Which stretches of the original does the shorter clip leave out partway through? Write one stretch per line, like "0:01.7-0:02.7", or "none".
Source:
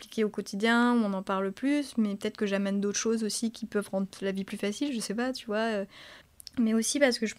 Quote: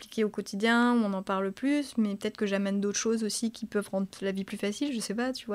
none